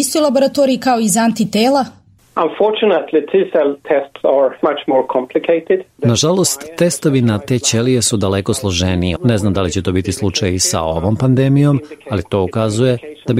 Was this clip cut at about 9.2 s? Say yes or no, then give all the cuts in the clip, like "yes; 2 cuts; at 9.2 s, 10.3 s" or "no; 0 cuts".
yes; 2 cuts; at 4.6 s, 9.2 s